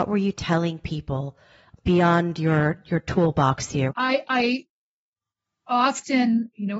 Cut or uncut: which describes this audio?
cut